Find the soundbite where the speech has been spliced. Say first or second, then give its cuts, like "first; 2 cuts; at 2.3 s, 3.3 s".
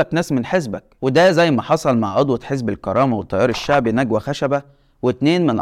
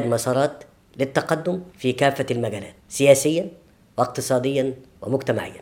second; 1 cut; at 1.7 s